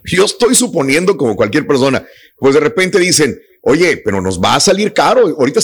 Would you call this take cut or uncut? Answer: uncut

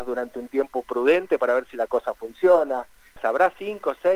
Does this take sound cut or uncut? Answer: cut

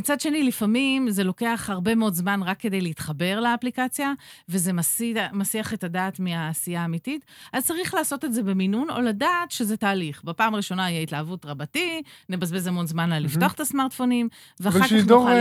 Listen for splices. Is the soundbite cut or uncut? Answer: uncut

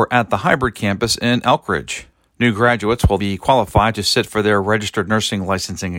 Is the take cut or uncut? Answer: cut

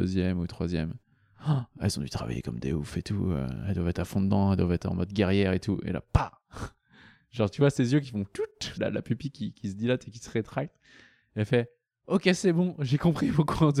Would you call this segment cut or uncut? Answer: cut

